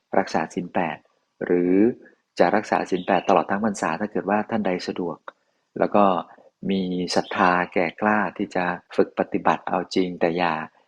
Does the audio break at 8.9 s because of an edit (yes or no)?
yes